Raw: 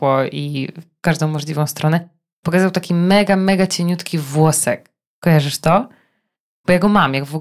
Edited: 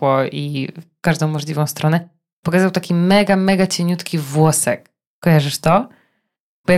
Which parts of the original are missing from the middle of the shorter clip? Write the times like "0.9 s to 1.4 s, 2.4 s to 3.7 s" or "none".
none